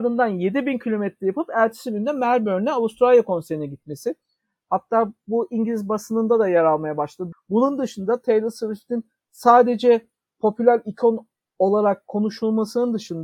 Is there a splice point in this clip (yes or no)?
yes